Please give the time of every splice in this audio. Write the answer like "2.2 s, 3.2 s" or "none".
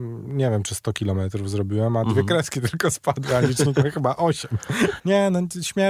5.0 s